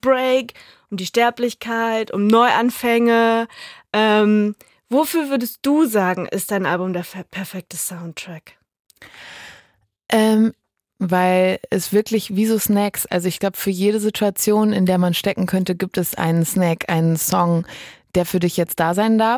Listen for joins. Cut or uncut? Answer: cut